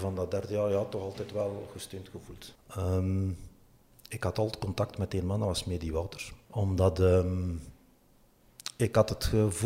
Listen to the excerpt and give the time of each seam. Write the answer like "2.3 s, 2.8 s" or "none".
2.5 s, 6.4 s